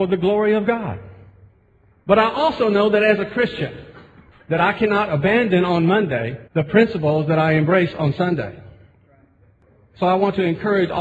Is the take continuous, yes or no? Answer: no